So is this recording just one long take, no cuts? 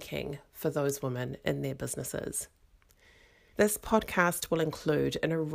no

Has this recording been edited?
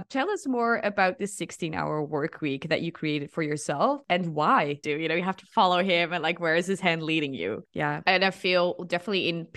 yes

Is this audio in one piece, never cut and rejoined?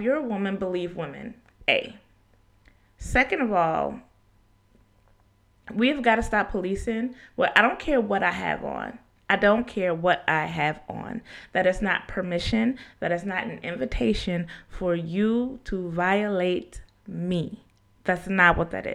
yes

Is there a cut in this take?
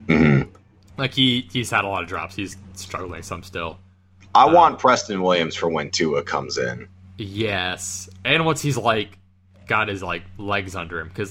no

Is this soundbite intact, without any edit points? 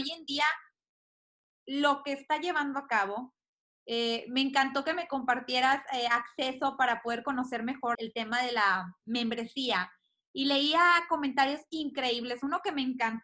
no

